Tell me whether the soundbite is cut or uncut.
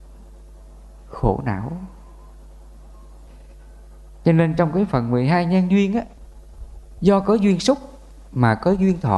uncut